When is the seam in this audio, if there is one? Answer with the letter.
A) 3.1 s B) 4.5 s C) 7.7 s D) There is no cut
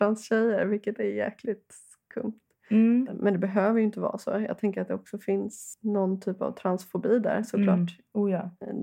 A